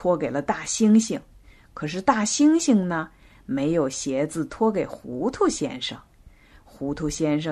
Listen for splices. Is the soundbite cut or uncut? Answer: uncut